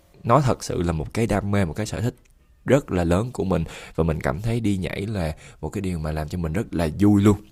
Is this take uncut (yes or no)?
yes